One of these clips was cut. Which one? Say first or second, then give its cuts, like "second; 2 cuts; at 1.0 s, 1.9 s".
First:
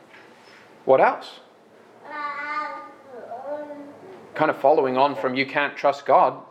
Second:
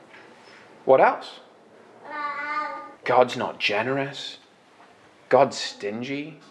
second; 1 cut; at 3.0 s